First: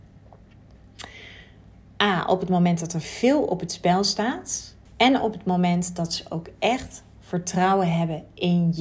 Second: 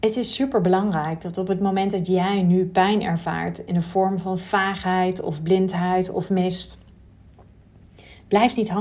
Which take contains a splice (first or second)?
first